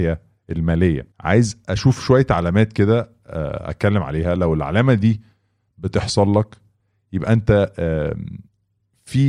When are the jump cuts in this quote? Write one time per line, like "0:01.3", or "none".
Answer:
0:01.1